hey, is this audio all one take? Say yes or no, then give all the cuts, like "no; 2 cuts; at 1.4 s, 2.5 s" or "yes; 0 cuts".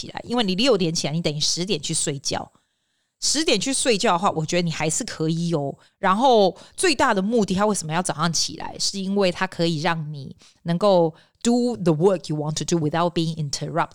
no; 1 cut; at 5.9 s